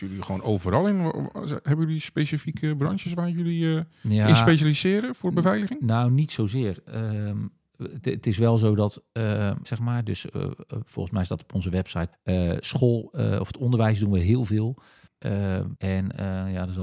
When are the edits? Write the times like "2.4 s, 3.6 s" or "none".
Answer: 9.6 s, 12.1 s, 15.8 s